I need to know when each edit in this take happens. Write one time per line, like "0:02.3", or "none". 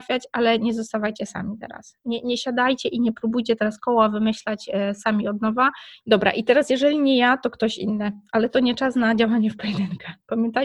0:06.0